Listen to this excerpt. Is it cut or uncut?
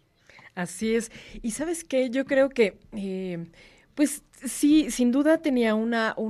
uncut